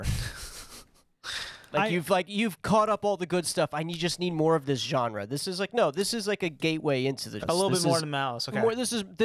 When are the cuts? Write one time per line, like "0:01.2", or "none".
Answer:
0:07.4